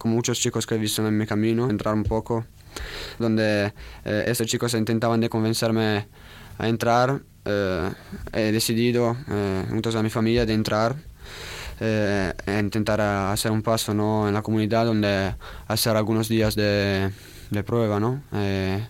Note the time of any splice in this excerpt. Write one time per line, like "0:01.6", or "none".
0:01.7
0:03.2